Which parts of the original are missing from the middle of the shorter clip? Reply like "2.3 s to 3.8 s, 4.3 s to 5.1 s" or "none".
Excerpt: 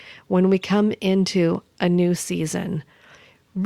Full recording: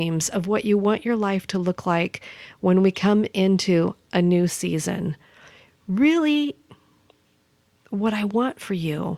none